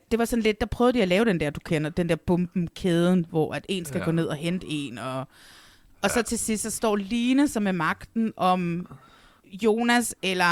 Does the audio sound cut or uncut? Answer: uncut